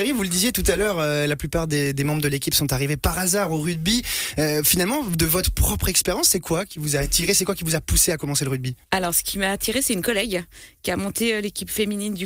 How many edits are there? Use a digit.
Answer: 1